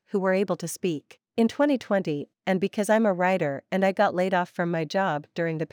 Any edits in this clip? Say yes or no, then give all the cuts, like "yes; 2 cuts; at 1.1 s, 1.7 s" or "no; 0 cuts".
yes; 2 cuts; at 1.3 s, 2.3 s